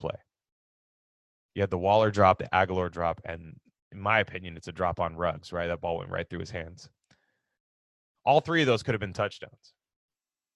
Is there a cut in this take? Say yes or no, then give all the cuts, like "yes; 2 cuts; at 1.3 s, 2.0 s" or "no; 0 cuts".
no; 0 cuts